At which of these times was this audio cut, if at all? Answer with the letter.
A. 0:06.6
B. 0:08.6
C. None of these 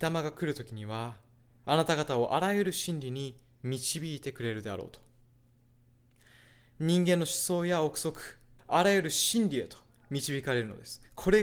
B